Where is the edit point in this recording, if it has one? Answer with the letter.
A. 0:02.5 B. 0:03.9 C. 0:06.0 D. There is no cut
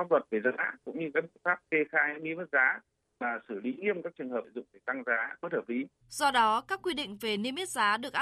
C